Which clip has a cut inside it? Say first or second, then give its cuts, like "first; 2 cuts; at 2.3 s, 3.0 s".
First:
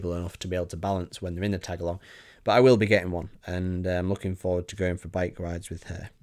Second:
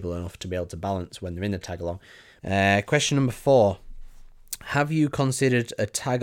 second; 1 cut; at 2.4 s